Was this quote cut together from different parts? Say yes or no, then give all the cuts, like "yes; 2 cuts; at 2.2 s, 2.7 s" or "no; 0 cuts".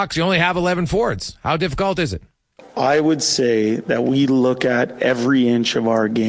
no; 0 cuts